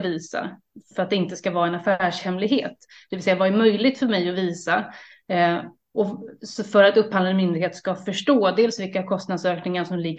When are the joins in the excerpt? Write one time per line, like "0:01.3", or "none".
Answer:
0:00.9